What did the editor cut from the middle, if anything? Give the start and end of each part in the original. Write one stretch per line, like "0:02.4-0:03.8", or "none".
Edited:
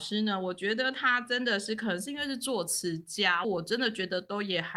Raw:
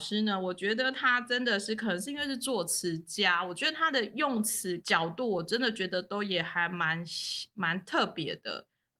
0:03.4-0:05.3